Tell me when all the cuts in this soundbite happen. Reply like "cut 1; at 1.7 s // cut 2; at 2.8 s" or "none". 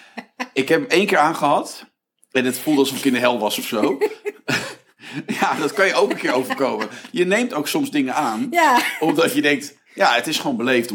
none